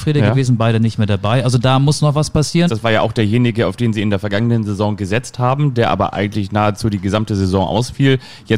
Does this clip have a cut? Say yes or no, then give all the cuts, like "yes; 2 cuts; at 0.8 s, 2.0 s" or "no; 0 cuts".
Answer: yes; 1 cut; at 2.7 s